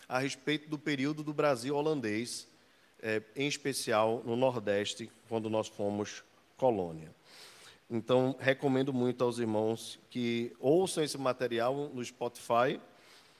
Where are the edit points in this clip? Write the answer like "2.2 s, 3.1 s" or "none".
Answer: none